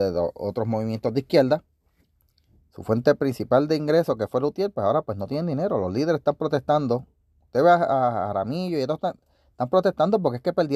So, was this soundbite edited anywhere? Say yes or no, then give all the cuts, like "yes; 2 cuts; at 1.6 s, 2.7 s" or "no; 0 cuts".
no; 0 cuts